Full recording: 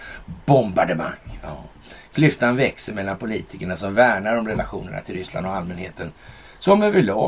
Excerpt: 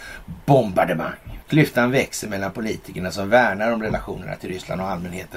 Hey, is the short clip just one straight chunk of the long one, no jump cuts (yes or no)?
no